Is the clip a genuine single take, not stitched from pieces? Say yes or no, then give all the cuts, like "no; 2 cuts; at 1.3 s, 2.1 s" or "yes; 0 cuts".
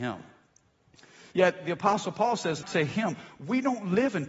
no; 2 cuts; at 1.3 s, 2.6 s